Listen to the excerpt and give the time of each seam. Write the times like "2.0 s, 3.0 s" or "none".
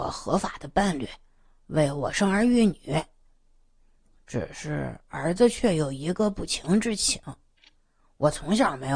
none